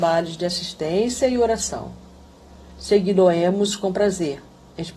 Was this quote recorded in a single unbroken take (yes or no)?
yes